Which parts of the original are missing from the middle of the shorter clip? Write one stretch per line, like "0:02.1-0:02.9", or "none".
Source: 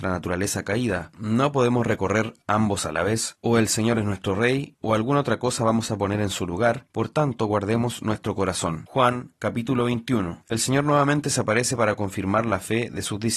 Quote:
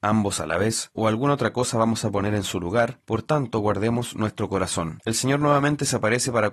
0:03.4-0:04.8
0:08.9-0:10.4

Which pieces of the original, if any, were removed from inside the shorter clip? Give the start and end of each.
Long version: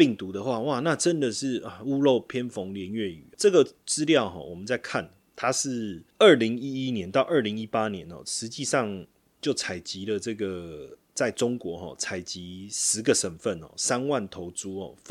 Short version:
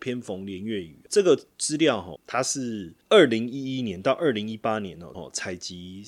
0:04.4-0:05.3
0:08.2-0:11.8

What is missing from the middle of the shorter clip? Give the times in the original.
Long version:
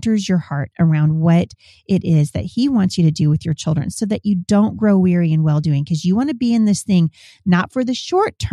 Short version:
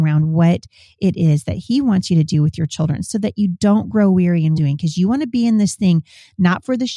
0:05.4-0:05.6

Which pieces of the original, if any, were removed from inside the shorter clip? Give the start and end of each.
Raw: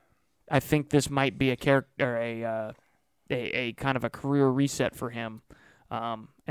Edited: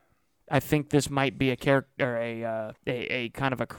0:02.8-0:03.2

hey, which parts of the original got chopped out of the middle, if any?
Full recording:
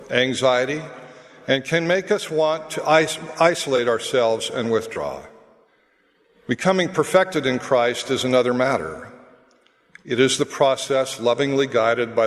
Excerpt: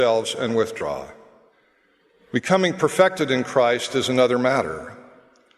none

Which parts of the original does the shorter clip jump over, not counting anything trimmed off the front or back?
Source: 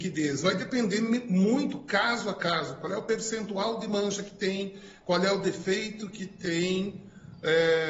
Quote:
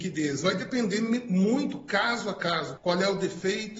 0:02.8-0:05.0

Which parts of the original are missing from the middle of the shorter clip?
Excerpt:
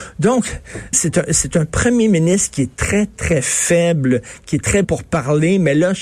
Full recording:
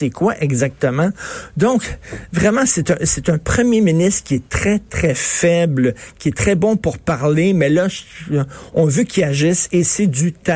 0:02.3-0:02.7
0:06.6-0:06.8

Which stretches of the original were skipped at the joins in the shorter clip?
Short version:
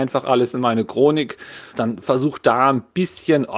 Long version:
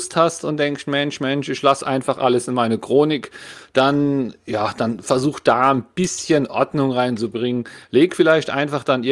0:03.7-0:04.7

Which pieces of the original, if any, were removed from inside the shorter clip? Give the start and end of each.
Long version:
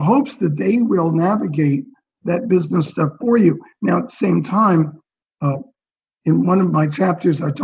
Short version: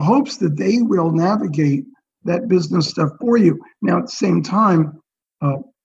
none

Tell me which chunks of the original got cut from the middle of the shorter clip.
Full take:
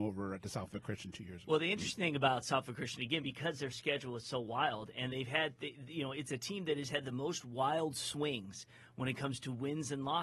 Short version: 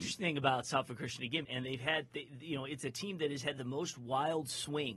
0:03.2-0:04.9

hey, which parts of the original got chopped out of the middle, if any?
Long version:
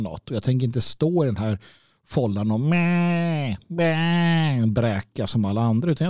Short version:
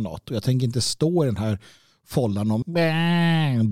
0:02.6-0:03.6

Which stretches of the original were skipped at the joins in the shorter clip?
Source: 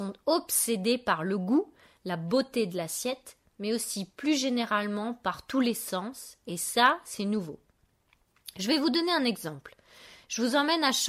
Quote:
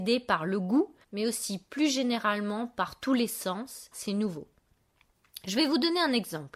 0:01.8-0:03.5
0:06.4-0:07.0

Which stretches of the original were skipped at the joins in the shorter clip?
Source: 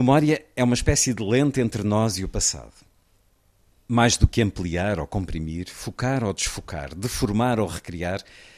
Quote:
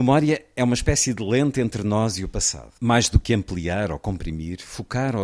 0:02.8-0:03.8

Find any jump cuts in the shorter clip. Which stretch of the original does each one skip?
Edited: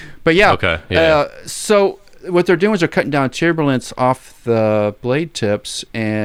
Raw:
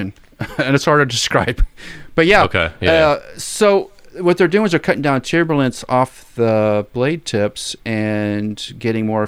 none

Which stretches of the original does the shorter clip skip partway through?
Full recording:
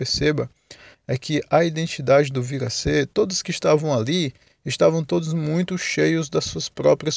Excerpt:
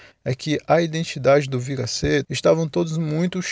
0:03.1-0:04.6

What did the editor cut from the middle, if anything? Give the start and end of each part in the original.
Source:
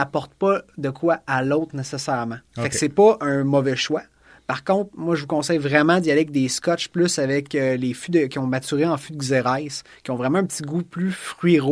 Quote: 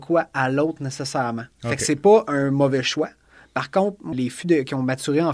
0:05.1-0:07.8

